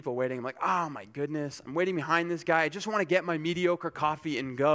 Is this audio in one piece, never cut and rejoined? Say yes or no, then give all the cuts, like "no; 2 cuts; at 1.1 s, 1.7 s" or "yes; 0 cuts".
yes; 0 cuts